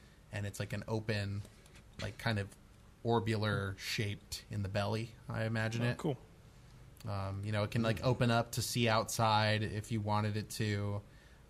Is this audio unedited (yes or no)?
yes